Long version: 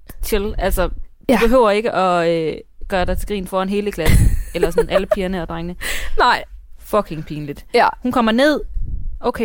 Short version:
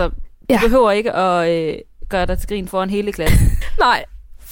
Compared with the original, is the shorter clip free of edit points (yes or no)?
no